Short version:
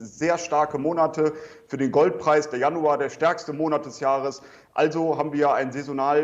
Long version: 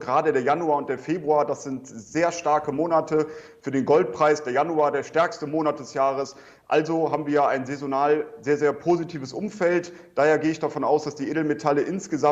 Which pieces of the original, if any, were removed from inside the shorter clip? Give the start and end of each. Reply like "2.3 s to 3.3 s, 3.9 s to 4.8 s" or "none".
none